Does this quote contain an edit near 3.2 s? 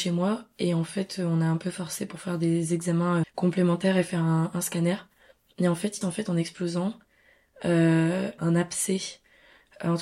yes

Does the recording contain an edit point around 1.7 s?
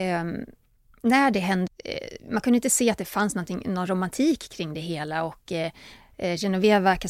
yes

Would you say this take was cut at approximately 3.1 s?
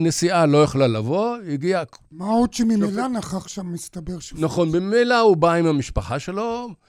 no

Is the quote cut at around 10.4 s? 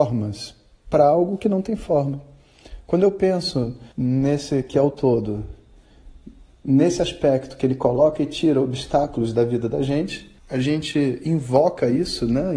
yes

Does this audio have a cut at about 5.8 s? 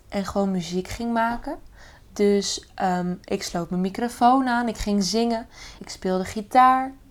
yes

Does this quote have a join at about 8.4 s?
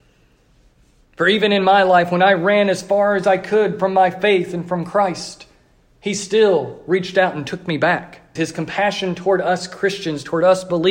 yes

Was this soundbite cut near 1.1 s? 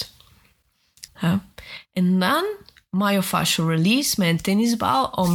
yes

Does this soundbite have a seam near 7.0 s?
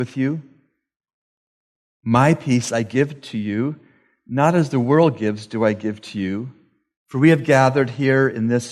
yes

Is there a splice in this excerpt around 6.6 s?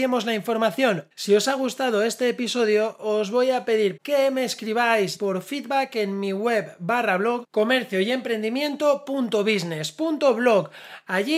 no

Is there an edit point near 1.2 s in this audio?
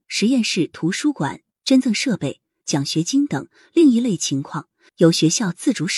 no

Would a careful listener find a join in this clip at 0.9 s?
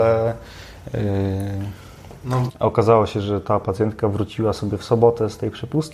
no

